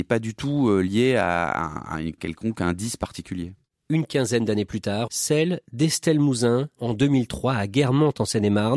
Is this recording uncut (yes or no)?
no